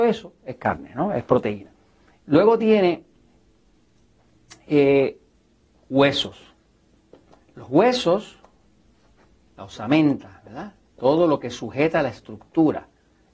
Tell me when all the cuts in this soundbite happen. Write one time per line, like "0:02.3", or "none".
none